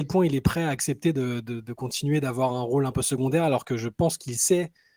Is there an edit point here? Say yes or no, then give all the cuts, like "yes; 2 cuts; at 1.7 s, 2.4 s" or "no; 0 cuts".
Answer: no; 0 cuts